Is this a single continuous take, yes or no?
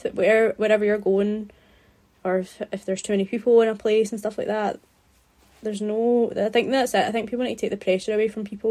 yes